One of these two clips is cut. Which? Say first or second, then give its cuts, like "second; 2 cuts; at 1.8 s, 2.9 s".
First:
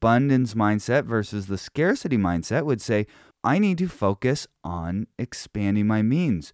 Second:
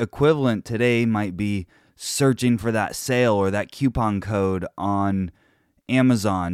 first; 1 cut; at 3.3 s